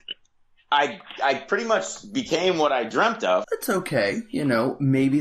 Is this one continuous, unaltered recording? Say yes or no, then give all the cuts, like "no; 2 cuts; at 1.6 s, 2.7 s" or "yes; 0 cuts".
no; 1 cut; at 3.4 s